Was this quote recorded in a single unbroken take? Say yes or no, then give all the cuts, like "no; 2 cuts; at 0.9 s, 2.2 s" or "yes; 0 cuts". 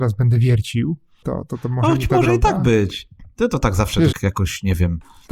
no; 1 cut; at 4.1 s